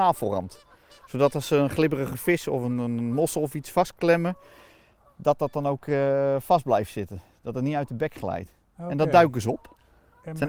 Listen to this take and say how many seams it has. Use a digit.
0